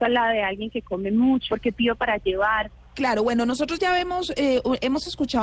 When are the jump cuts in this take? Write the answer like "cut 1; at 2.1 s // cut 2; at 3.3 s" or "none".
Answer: cut 1; at 1.5 s // cut 2; at 2.9 s